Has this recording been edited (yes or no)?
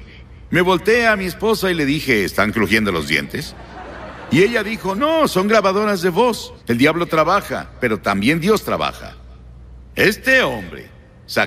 yes